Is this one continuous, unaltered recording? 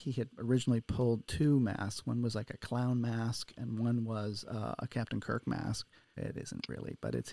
no; 1 cut; at 6.1 s

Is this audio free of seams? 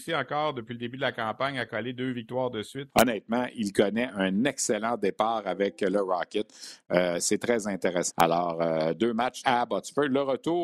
no; 3 cuts; at 2.9 s, 8.1 s, 9.4 s

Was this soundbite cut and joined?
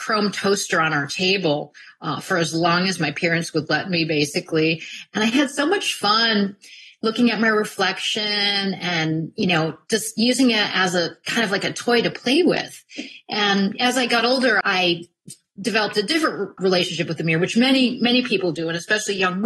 yes; 2 cuts; at 14.6 s, 16.6 s

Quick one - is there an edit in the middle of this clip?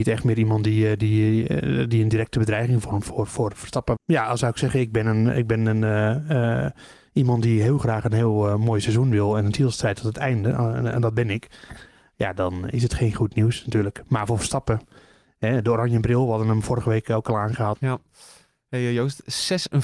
yes; 2 cuts; at 4.0 s, 17.7 s

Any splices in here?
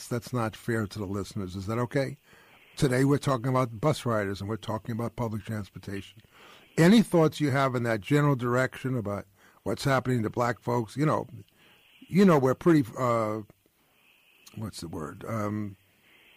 no; 0 cuts

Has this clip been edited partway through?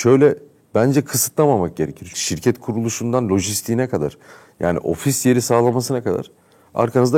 yes; 1 cut; at 2.1 s

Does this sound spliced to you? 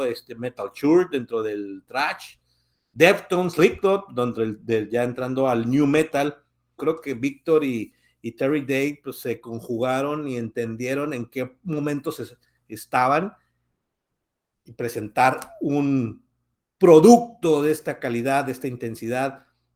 yes; 1 cut; at 6.8 s

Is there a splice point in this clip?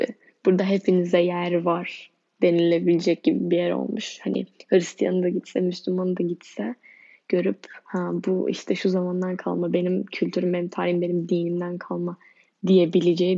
no; 0 cuts

